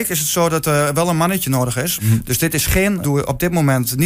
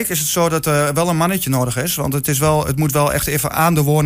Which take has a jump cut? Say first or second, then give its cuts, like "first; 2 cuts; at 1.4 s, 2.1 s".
first; 2 cuts; at 2.0 s, 3.0 s